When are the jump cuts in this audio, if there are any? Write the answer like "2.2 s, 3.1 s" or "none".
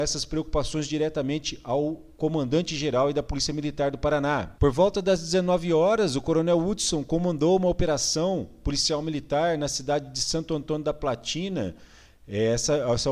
none